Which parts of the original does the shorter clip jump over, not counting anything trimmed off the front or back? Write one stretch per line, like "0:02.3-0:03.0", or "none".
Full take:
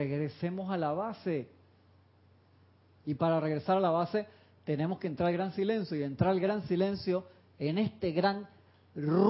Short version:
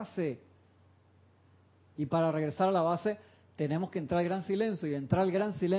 none